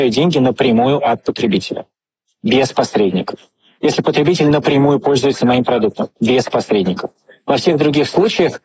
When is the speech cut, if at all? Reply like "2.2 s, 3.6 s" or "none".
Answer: none